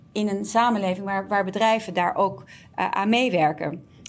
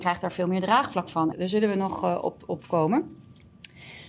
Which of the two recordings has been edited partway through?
second; 1 cut; at 1.3 s

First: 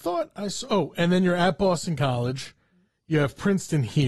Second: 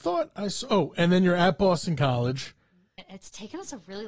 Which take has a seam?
second; 1 cut; at 3.0 s

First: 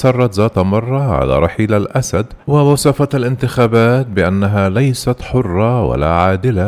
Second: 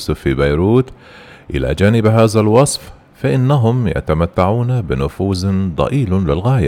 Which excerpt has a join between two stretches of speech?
first; 1 cut; at 2.4 s

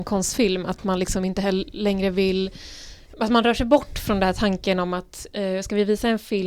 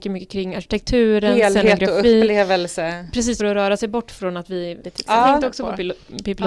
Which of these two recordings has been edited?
second; 2 cuts; at 3.4 s, 4.8 s

